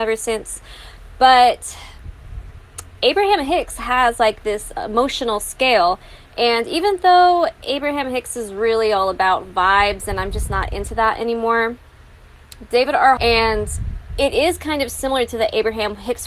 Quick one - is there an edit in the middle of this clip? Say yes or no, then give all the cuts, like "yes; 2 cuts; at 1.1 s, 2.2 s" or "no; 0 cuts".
yes; 1 cut; at 13.2 s